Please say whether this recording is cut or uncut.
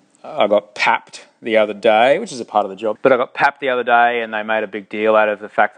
cut